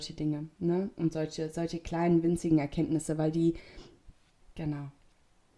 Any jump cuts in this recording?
yes; 1 cut; at 4.4 s

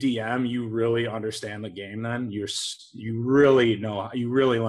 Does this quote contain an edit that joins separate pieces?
no; 0 cuts

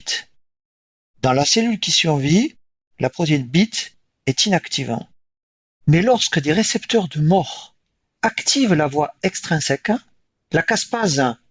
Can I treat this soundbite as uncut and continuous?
yes; 0 cuts

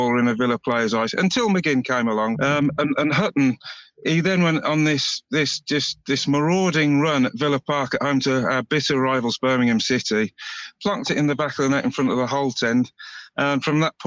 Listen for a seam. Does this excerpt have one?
yes; 1 cut; at 2.3 s

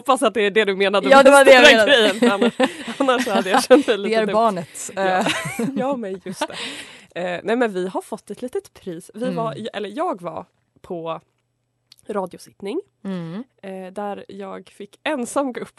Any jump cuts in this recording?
no; 0 cuts

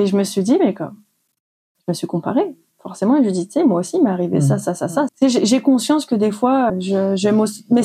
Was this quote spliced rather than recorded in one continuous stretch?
yes; 2 cuts; at 5.1 s, 6.7 s

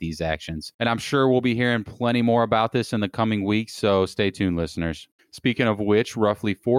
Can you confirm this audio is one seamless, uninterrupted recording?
no; 1 cut; at 5.2 s

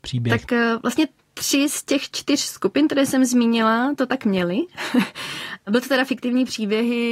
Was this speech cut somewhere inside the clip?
no; 0 cuts

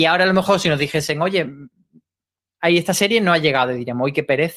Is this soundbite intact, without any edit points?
yes; 0 cuts

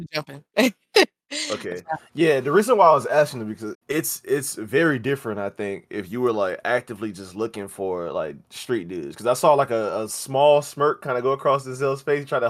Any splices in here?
yes; 1 cut; at 3.7 s

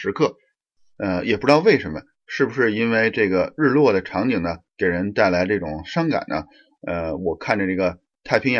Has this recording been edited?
no; 0 cuts

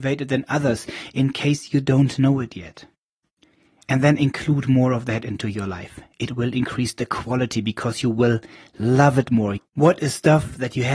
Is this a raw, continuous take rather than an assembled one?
no; 1 cut; at 9.6 s

